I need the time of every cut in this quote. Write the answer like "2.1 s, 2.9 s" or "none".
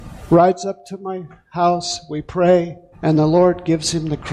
2.9 s